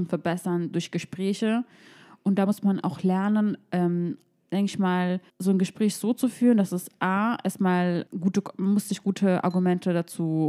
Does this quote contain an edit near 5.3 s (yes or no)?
yes